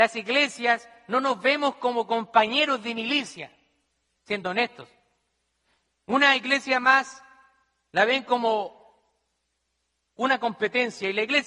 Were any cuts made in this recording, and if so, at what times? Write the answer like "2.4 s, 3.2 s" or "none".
4.1 s